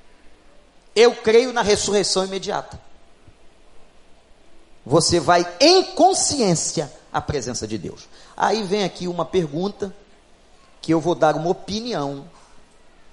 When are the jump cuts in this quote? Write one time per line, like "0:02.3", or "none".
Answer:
0:04.8